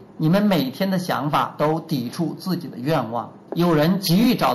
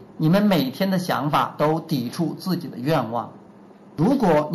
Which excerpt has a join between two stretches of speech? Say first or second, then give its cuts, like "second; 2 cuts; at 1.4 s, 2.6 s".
first; 1 cut; at 3.5 s